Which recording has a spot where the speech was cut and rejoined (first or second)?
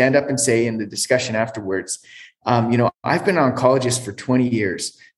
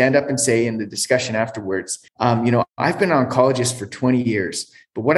second